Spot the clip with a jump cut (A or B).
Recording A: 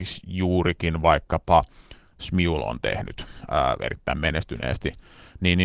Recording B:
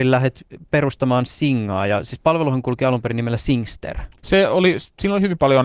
B